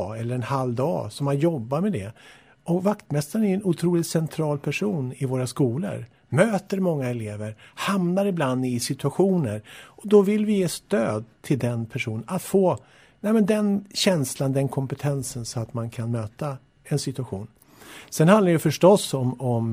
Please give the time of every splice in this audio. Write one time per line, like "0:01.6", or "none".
none